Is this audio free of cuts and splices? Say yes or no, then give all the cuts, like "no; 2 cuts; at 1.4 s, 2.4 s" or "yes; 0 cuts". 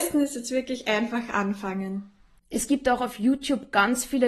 no; 1 cut; at 2.4 s